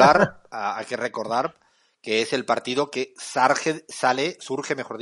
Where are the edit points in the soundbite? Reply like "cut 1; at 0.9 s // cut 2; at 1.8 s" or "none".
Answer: none